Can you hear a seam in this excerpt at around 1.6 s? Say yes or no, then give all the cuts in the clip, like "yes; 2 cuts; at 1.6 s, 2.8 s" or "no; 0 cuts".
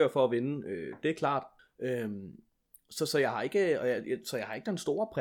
yes; 1 cut; at 1.6 s